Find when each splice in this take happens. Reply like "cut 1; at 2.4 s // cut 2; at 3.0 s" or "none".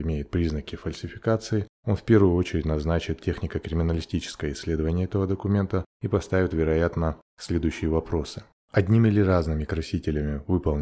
cut 1; at 8.6 s